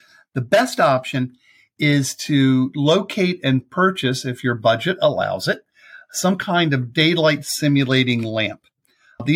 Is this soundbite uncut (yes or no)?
yes